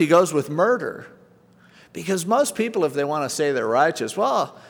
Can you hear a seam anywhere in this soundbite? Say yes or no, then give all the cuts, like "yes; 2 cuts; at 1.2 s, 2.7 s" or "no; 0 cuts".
no; 0 cuts